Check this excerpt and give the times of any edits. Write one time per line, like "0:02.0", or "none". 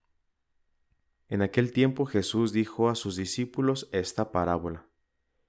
none